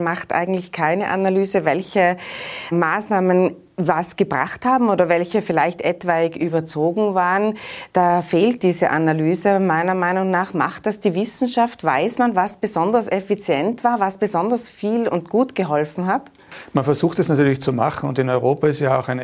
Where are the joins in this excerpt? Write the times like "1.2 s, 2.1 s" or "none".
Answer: 2.7 s